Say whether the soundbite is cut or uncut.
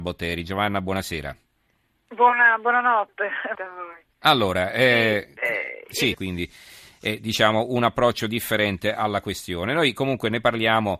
cut